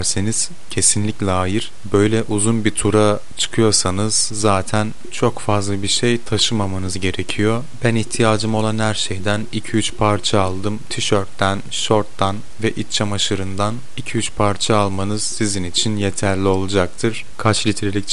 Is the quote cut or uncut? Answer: uncut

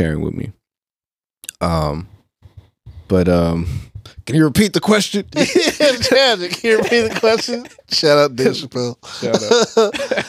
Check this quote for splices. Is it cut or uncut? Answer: cut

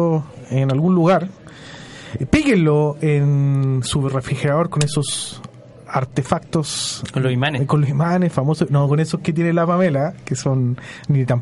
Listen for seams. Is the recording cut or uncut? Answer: uncut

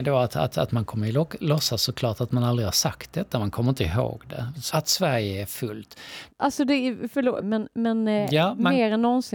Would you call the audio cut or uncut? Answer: cut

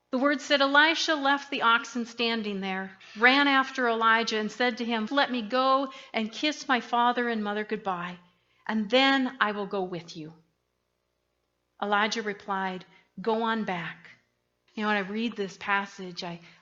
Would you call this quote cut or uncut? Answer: cut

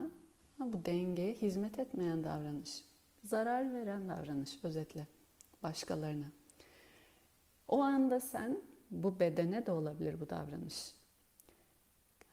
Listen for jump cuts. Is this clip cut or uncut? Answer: uncut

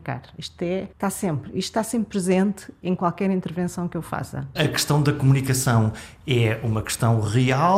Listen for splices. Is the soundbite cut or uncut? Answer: cut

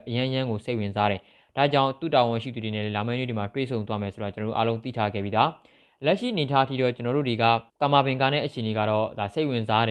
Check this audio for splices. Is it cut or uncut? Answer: cut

